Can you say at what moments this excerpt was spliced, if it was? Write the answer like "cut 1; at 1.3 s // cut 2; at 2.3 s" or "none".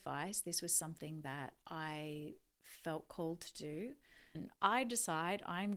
cut 1; at 4.3 s

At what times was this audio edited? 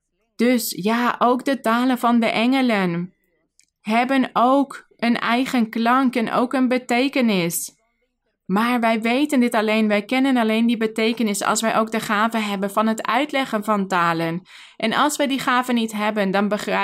none

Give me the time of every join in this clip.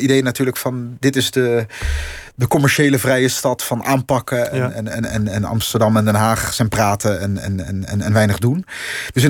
none

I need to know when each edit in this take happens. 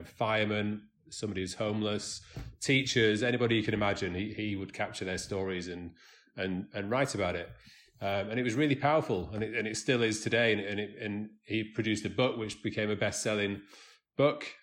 none

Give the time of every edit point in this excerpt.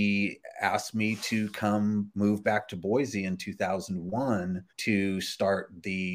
cut 1; at 4.7 s

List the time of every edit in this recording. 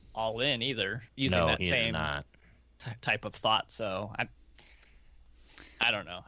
cut 1; at 1.1 s

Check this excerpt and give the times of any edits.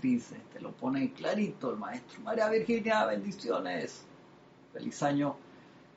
none

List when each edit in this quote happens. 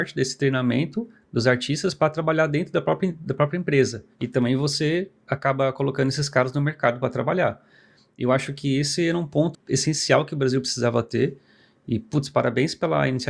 cut 1; at 4.1 s // cut 2; at 9.5 s

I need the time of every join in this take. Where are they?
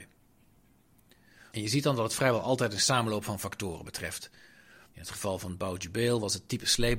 cut 1; at 1.5 s // cut 2; at 4.9 s

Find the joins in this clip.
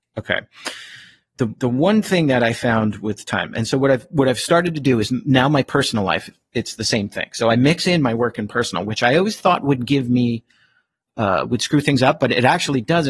none

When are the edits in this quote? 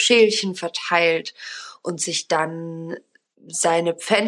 none

